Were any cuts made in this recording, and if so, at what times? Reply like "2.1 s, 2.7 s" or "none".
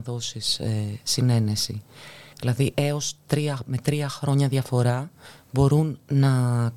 2.3 s